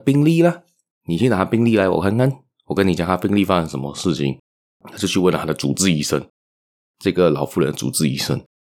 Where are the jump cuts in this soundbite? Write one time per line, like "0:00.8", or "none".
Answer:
0:04.7

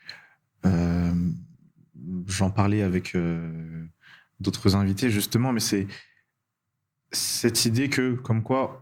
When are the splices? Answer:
none

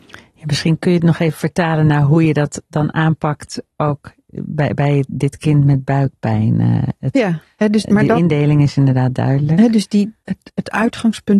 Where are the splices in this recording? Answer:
0:10.2

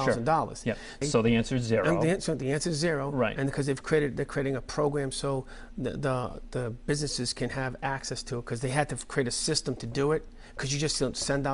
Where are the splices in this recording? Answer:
0:01.0

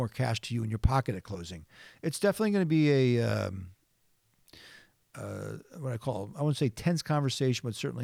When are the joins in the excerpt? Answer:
none

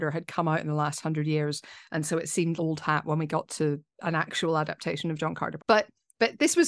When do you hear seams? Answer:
0:02.6
0:05.6

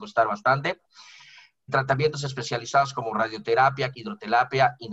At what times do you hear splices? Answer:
0:01.7
0:03.9

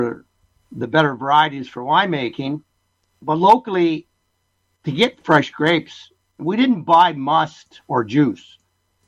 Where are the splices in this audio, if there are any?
0:06.2

